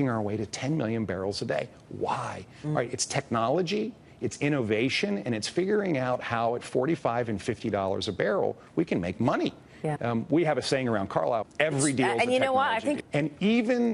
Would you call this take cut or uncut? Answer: cut